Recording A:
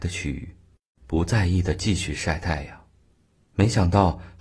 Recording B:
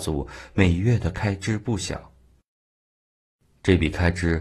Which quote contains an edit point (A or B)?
A